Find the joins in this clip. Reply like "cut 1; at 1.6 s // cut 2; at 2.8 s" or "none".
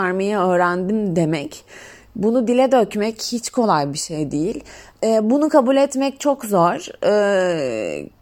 cut 1; at 4.9 s

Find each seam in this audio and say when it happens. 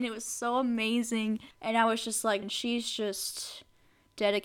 cut 1; at 2.4 s

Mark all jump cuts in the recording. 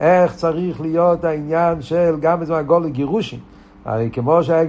none

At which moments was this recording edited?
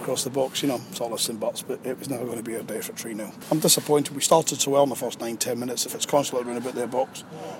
cut 1; at 5.9 s

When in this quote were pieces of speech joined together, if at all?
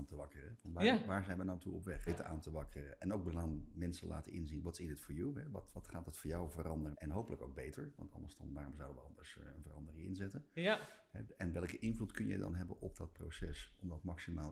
cut 1; at 2.1 s // cut 2; at 5.7 s // cut 3; at 6.9 s

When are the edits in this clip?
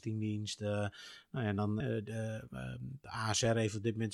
cut 1; at 1.8 s

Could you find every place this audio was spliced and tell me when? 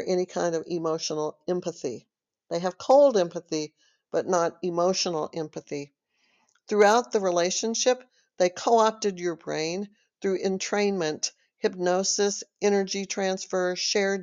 none

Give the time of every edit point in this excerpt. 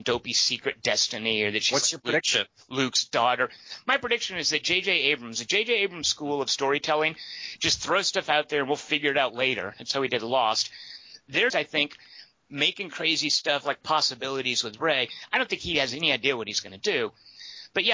cut 1; at 11.5 s

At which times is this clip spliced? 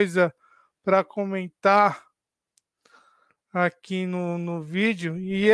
none

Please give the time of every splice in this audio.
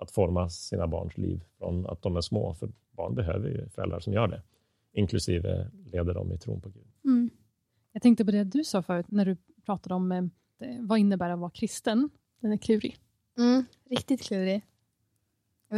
cut 1; at 9.1 s // cut 2; at 12.2 s

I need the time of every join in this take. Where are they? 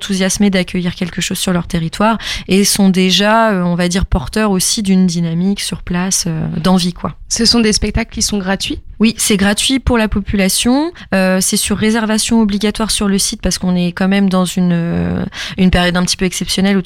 none

